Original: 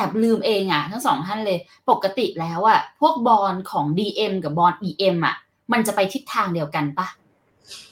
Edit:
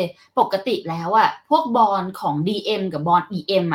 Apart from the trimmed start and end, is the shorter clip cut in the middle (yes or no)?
no